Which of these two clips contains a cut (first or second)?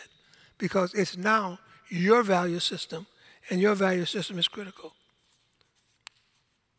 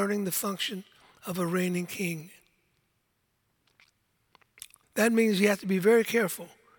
second